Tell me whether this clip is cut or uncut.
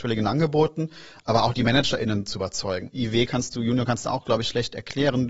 cut